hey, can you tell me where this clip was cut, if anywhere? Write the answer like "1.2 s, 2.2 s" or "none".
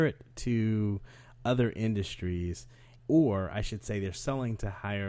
3.0 s